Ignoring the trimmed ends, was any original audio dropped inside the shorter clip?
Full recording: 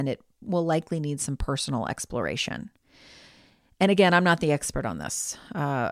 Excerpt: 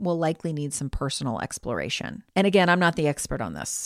yes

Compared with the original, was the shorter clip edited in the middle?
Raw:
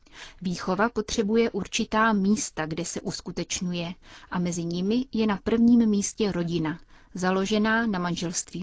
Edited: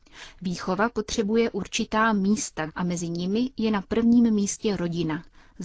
yes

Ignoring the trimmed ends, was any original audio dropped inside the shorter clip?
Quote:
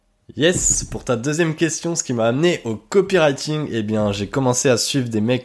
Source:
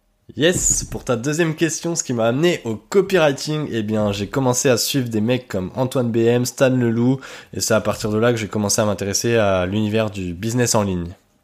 no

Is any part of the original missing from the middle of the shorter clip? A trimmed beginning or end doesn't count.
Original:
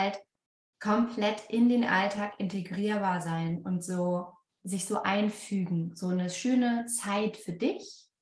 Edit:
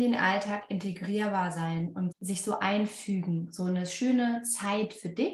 yes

